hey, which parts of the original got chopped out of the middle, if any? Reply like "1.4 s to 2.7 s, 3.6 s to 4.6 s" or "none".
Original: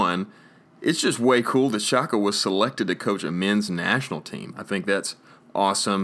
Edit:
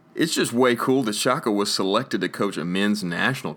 none